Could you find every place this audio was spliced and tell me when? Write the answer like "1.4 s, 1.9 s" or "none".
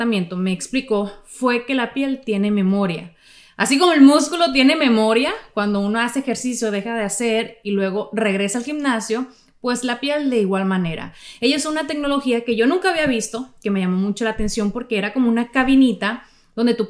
none